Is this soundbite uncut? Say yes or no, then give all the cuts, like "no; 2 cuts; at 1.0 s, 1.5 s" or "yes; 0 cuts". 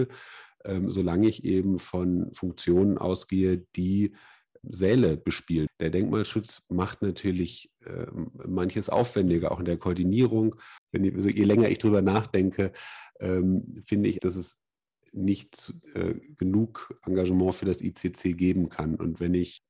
no; 3 cuts; at 5.7 s, 10.8 s, 14.2 s